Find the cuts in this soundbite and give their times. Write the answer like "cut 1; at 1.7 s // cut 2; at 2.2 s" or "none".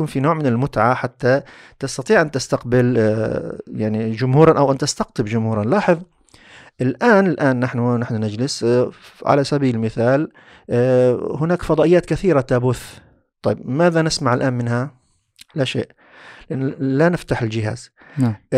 none